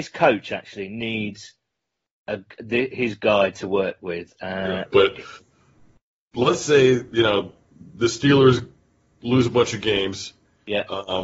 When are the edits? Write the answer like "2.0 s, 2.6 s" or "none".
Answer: 4.8 s